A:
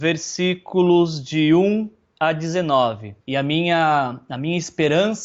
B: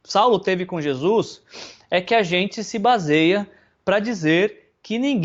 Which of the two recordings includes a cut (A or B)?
A